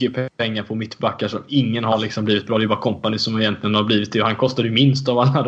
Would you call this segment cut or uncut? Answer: uncut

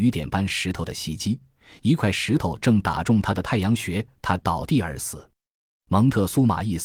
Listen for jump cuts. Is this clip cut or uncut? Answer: uncut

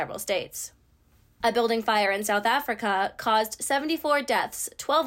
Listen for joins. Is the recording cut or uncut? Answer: uncut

